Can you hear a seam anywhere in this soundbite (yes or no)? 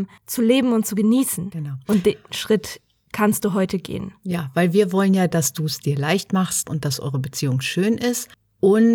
no